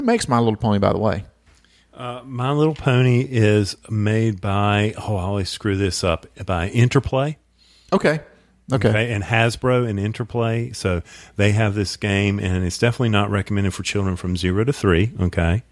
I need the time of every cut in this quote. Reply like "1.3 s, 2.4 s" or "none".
none

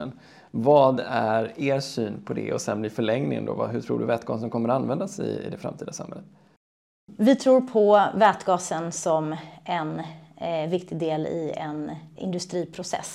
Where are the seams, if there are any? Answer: 12.2 s

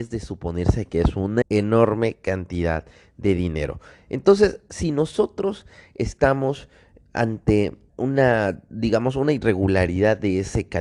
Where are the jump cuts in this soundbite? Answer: 1.4 s, 7.9 s

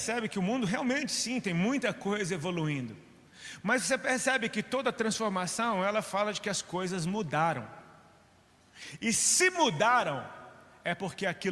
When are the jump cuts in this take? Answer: none

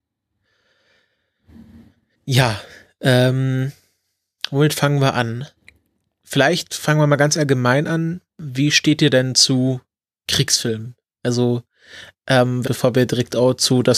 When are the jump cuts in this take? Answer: 12.6 s

